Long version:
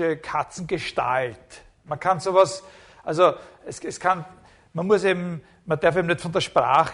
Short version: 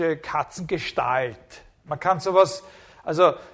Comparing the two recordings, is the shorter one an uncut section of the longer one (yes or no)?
yes